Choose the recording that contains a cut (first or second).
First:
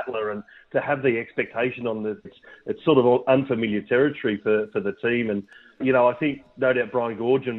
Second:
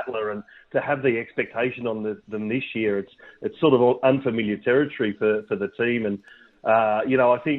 first